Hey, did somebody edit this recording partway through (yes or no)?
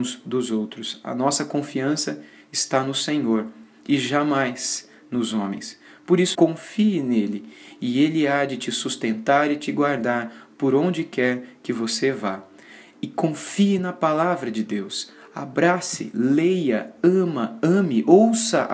yes